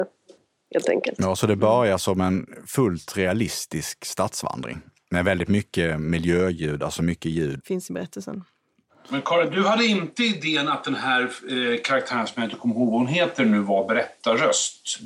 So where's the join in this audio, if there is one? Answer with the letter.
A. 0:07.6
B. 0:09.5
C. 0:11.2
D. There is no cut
A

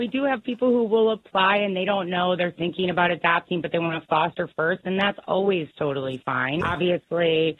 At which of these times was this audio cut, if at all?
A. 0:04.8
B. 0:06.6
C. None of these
B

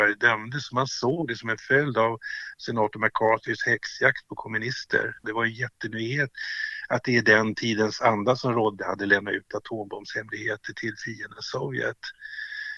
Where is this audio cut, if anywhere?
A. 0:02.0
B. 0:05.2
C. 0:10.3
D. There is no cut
B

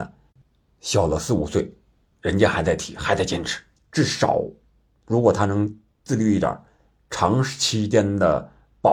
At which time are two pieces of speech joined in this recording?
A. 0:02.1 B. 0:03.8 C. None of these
B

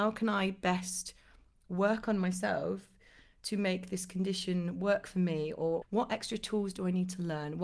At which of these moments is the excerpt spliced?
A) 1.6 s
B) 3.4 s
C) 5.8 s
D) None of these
C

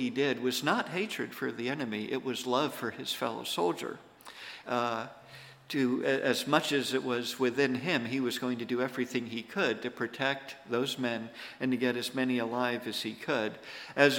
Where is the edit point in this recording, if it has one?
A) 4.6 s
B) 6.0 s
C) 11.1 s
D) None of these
A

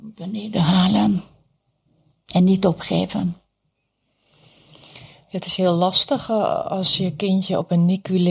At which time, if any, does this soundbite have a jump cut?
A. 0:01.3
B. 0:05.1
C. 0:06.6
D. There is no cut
D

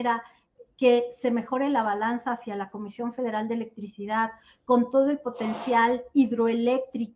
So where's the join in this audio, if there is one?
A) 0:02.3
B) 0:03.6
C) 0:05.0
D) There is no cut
D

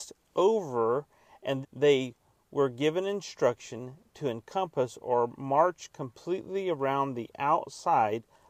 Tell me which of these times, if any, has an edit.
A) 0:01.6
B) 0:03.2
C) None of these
A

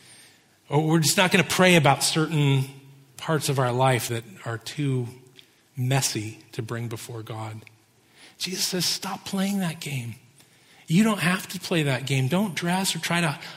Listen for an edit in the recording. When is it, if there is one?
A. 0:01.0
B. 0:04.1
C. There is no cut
B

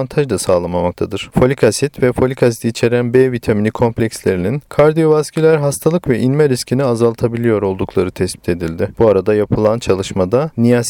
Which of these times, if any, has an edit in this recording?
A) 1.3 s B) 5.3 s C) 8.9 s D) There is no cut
A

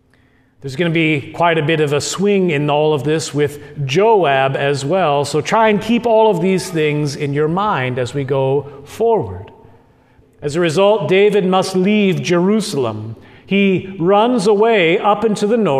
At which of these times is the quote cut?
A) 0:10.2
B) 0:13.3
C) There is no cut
A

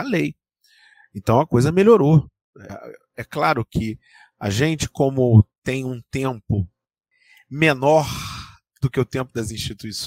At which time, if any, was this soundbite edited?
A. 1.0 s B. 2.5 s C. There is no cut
C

